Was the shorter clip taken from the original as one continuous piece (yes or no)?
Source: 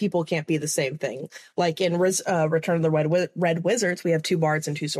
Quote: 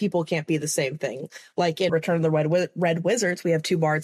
no